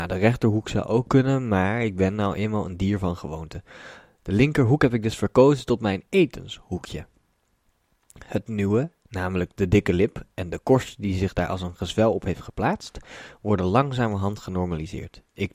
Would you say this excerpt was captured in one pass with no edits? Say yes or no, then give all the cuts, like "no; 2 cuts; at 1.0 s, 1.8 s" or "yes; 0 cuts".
yes; 0 cuts